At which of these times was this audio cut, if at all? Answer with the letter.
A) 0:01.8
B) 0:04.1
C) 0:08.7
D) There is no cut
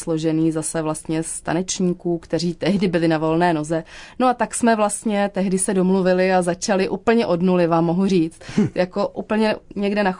D